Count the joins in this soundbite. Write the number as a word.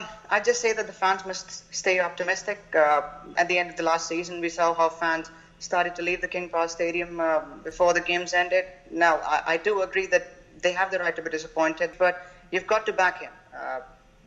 two